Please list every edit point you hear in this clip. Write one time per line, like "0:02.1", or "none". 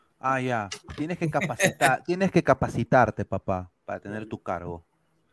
none